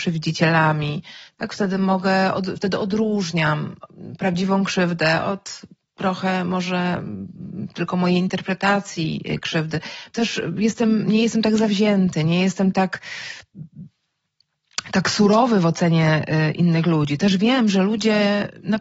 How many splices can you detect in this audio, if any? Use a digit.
1